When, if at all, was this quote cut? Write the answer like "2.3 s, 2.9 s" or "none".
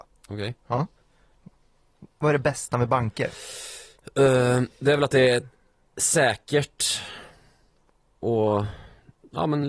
none